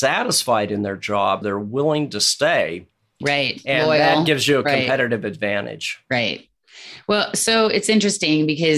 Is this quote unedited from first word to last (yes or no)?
no